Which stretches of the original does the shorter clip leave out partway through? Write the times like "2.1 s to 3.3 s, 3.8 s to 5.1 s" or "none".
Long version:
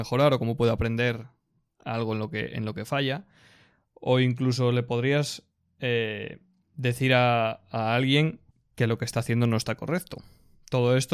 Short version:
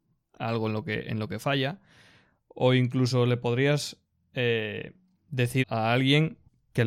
7.1 s to 7.6 s